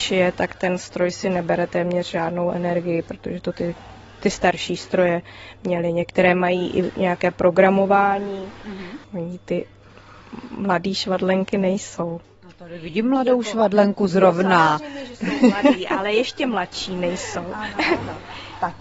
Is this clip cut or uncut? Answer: cut